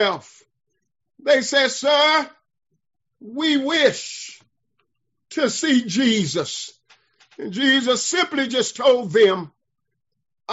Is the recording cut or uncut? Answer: uncut